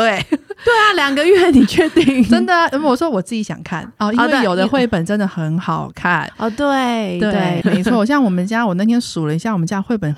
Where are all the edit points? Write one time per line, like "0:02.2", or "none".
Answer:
0:07.6